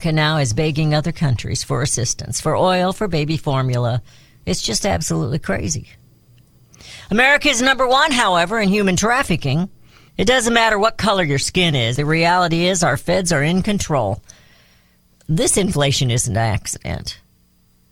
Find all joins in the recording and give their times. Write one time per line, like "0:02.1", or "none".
0:10.1
0:12.0